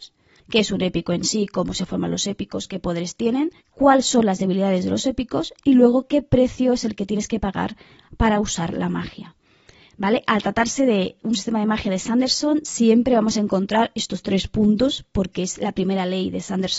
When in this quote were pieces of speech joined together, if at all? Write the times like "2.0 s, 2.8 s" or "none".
3.6 s